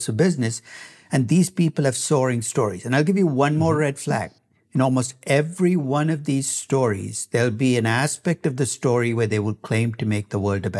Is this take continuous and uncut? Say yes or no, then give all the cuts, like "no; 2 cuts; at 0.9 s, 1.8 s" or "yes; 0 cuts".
yes; 0 cuts